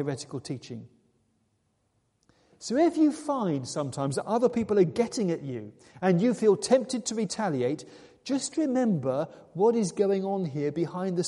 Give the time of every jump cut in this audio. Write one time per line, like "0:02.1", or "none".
none